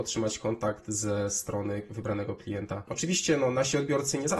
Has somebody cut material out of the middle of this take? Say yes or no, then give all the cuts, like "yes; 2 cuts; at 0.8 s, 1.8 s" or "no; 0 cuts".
no; 0 cuts